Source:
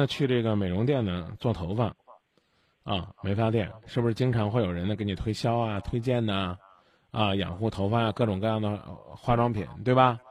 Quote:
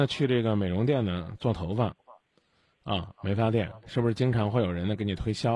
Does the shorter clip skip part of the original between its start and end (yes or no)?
no